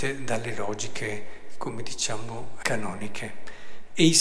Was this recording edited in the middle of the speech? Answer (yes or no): yes